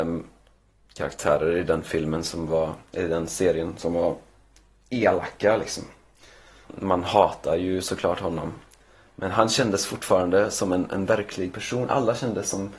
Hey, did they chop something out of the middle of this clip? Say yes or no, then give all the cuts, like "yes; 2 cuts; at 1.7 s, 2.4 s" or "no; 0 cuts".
yes; 1 cut; at 6.6 s